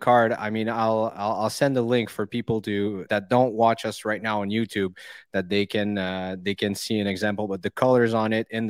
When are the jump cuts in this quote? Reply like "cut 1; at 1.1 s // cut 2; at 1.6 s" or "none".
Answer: cut 1; at 3.1 s